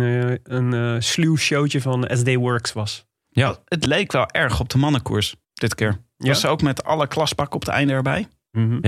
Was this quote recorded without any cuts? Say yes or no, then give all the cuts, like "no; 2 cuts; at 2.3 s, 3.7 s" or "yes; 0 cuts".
no; 1 cut; at 5.4 s